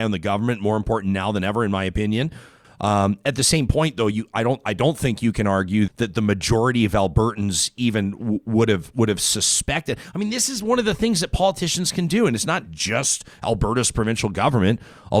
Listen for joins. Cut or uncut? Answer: cut